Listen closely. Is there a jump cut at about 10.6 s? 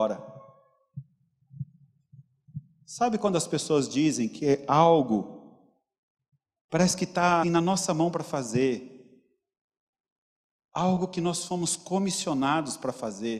no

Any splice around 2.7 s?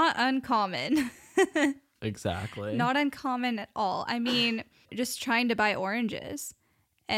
no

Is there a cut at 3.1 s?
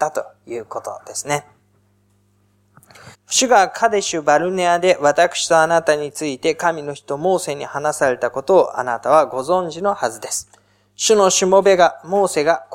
yes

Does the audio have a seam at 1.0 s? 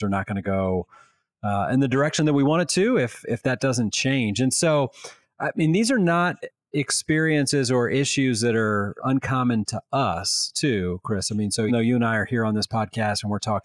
no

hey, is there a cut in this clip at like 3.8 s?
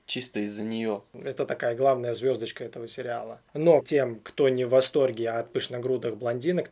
yes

